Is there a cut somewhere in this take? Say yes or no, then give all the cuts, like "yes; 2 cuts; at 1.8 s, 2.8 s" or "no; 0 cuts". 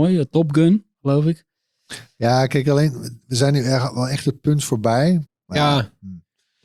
yes; 1 cut; at 5.3 s